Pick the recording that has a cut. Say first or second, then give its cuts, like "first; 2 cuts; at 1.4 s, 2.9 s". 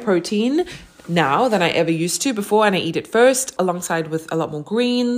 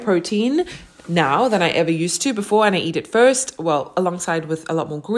first; 1 cut; at 3.6 s